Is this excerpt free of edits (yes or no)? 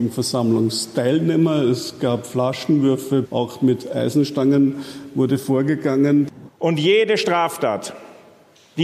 no